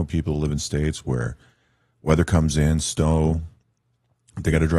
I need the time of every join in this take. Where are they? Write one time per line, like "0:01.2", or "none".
none